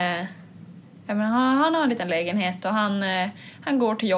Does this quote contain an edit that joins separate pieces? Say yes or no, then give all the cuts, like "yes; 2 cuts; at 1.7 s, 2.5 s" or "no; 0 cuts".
no; 0 cuts